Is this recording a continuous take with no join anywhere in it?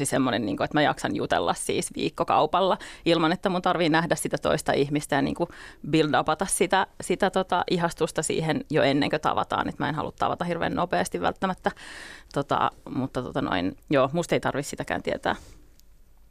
no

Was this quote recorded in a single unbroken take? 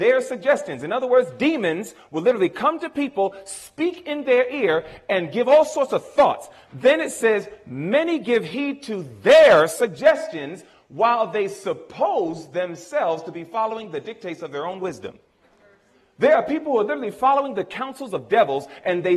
yes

